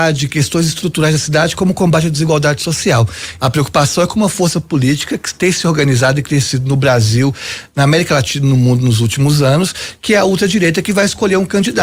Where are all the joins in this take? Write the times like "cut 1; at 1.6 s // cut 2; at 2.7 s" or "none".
cut 1; at 3.4 s